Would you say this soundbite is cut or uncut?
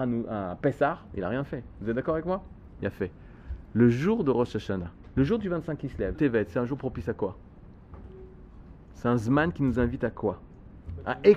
cut